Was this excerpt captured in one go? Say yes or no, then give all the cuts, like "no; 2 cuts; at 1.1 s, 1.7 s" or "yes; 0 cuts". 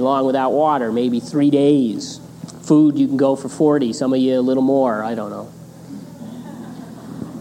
yes; 0 cuts